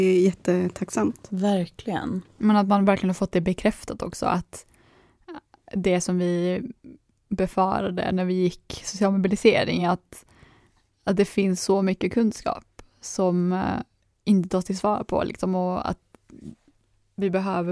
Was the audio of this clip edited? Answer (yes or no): no